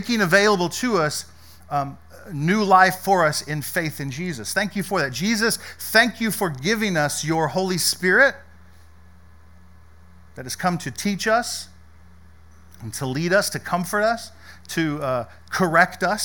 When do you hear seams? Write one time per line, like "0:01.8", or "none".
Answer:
none